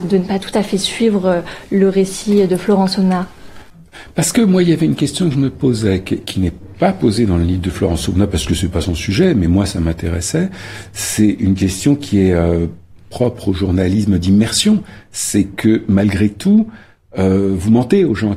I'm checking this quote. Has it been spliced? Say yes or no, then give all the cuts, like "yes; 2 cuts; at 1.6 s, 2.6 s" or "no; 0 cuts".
no; 0 cuts